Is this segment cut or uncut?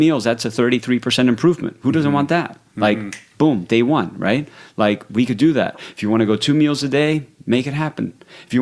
uncut